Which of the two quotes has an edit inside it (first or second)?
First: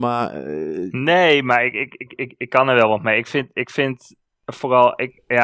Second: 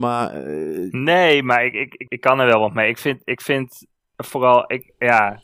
second